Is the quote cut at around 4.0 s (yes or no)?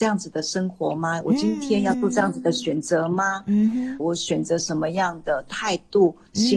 yes